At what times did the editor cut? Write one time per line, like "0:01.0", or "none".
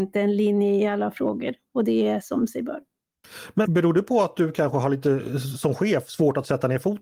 0:03.7